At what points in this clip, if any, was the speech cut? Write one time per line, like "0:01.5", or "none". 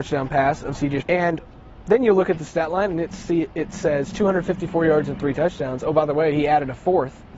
0:01.0